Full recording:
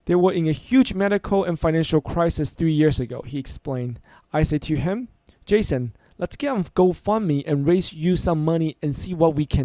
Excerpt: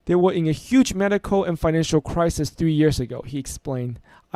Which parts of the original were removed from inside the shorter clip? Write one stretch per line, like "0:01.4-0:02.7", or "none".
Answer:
none